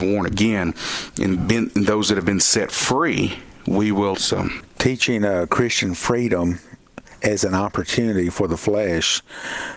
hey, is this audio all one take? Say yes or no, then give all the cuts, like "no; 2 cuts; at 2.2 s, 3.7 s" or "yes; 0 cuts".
no; 1 cut; at 4.1 s